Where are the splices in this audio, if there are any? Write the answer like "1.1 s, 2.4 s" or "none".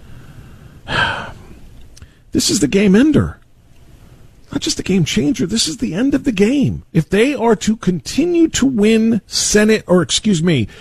6.9 s